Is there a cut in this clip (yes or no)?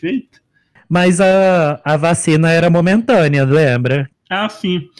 yes